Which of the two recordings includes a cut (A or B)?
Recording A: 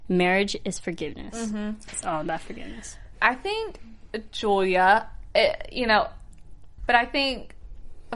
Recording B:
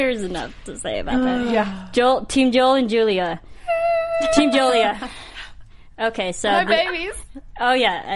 A